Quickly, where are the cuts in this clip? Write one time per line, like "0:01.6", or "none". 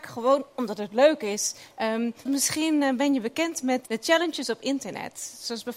0:02.3
0:03.9

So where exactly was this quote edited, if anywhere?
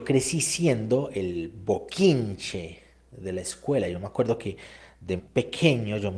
0:05.2

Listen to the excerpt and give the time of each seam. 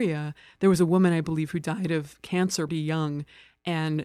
0:02.7

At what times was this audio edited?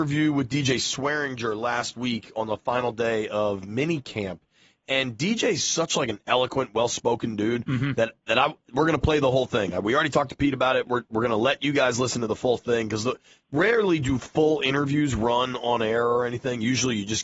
none

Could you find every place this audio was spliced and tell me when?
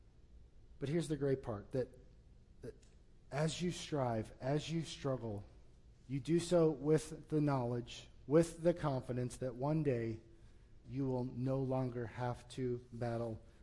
0:05.9
0:10.8

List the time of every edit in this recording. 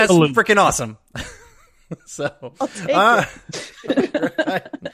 none

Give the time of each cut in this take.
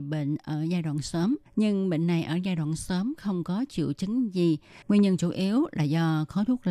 0:01.5
0:04.8

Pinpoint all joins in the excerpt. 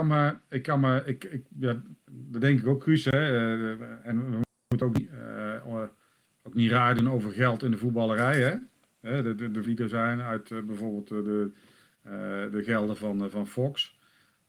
0:09.7

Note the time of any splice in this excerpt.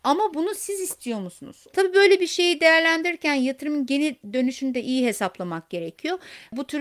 0:01.7

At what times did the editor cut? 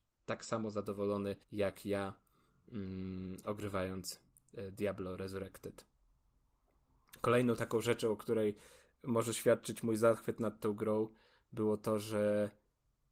0:01.4

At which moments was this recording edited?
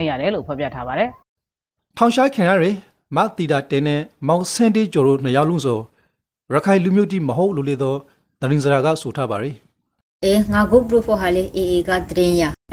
none

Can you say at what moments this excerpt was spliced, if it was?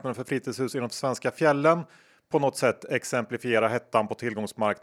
none

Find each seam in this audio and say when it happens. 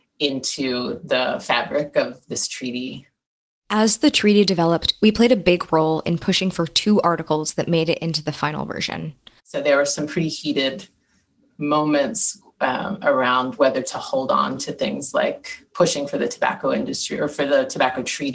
0:09.4

